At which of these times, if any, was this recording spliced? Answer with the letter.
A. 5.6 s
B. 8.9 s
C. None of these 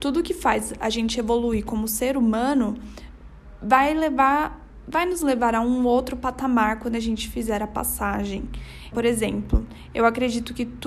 B